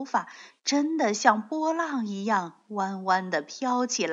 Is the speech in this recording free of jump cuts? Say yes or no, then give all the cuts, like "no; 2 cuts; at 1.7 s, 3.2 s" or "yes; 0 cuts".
yes; 0 cuts